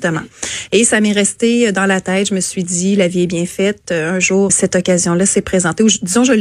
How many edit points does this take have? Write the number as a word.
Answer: one